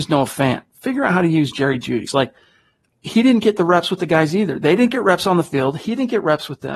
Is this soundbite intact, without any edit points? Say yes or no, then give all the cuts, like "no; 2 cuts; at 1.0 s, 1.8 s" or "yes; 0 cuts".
no; 1 cut; at 2.1 s